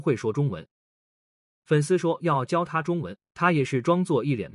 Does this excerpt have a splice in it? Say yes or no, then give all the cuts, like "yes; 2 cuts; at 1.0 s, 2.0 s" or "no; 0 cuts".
no; 0 cuts